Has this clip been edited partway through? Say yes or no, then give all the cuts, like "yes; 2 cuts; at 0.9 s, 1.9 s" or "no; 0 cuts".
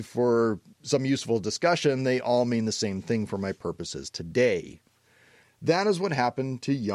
yes; 1 cut; at 5.4 s